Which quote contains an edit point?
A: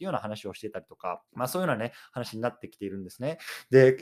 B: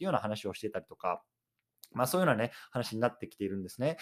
A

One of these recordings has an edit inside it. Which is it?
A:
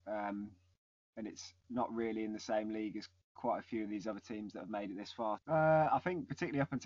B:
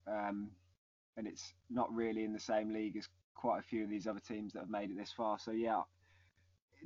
A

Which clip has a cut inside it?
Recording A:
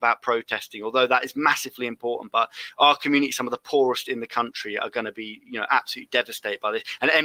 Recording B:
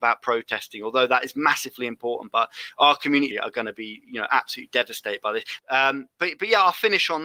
B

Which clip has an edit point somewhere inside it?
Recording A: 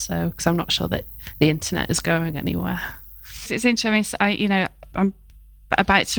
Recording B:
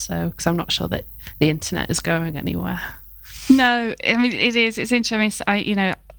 A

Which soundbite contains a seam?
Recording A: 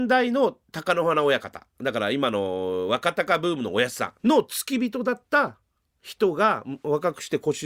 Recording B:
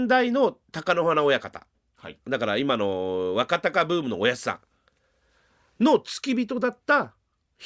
A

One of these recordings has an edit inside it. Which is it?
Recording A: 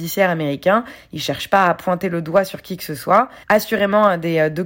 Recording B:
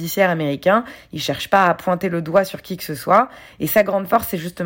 A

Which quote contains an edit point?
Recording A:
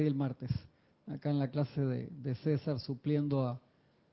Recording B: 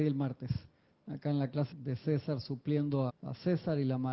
B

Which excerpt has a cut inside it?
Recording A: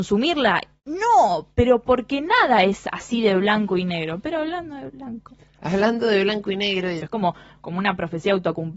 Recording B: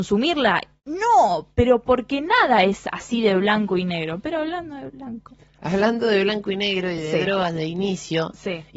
A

